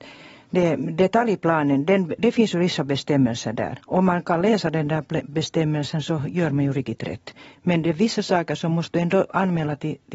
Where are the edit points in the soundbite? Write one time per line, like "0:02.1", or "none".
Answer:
0:02.2